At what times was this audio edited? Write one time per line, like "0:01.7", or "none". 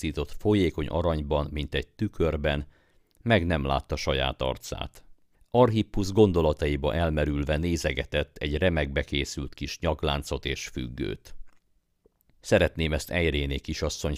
0:05.3